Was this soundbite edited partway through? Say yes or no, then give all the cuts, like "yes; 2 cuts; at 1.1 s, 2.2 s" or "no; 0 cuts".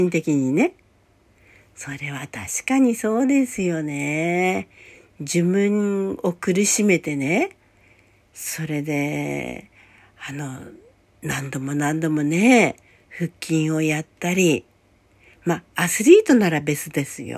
no; 0 cuts